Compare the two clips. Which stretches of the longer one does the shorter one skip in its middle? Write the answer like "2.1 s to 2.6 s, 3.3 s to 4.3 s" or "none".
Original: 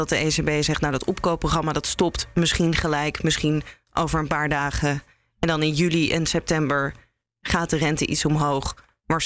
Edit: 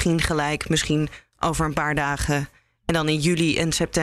none